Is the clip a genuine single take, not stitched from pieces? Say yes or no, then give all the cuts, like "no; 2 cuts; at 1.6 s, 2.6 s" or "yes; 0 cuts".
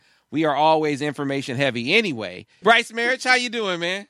no; 1 cut; at 2.6 s